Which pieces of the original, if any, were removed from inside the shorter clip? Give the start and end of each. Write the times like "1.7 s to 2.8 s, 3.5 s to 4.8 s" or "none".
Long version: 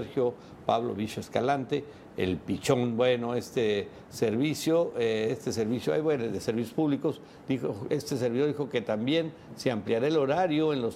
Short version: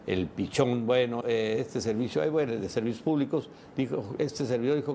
3.3 s to 4.9 s